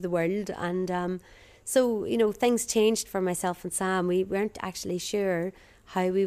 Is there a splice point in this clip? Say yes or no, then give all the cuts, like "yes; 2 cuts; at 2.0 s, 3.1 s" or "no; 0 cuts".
no; 0 cuts